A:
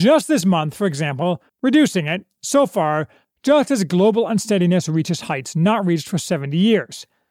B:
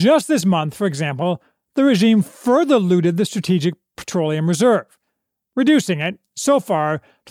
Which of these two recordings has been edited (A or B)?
A